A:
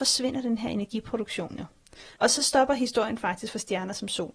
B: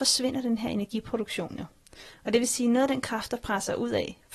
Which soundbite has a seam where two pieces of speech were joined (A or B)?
A